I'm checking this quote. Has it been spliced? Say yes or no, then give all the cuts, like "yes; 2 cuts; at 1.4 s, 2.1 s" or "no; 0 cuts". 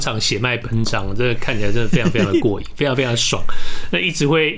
no; 0 cuts